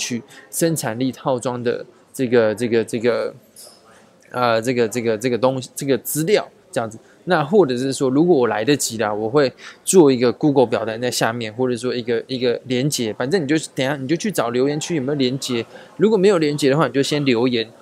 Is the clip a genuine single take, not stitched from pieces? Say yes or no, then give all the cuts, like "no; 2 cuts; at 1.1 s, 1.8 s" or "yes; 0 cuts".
yes; 0 cuts